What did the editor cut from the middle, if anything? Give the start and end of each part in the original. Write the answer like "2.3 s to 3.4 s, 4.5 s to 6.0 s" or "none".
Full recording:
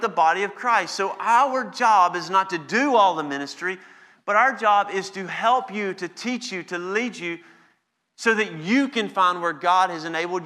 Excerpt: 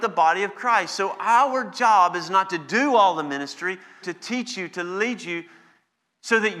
4.0 s to 6.0 s